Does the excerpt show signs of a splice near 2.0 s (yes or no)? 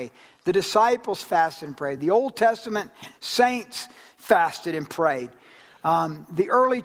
no